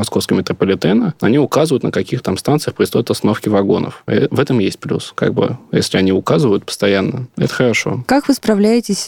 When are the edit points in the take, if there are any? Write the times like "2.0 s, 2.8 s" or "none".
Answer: 4.1 s